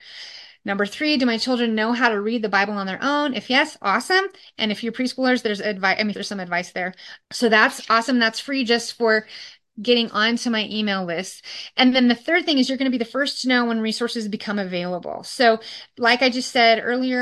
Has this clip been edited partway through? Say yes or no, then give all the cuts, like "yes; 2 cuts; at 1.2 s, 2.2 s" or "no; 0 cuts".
yes; 2 cuts; at 6.1 s, 7.2 s